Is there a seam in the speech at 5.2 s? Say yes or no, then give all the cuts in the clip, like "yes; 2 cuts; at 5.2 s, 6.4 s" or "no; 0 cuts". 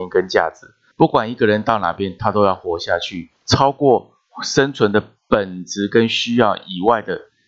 no; 2 cuts; at 0.9 s, 3.4 s